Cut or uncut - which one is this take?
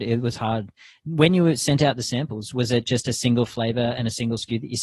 uncut